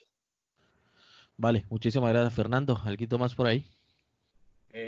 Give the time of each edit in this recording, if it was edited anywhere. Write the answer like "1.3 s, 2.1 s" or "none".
none

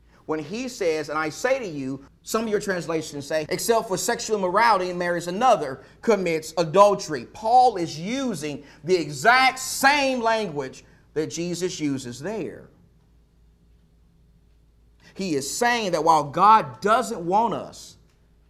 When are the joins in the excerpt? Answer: 2.1 s, 3.5 s

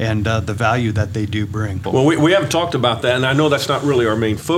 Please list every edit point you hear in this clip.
1.8 s

